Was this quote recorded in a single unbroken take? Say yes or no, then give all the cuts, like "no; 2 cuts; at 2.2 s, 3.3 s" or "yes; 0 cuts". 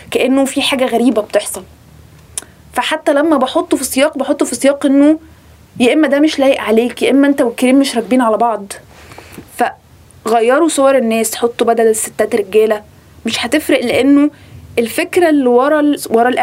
yes; 0 cuts